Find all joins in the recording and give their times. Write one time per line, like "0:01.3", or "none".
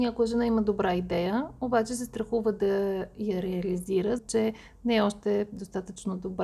0:04.2